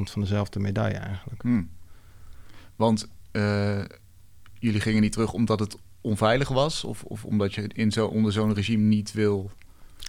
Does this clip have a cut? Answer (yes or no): yes